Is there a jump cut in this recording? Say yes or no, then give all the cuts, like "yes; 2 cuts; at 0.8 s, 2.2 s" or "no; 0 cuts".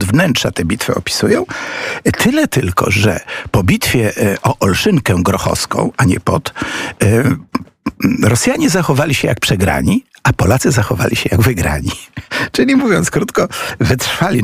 no; 0 cuts